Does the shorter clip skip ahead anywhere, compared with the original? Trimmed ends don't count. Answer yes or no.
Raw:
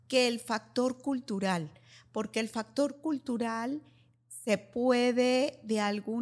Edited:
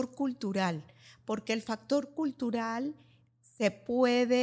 no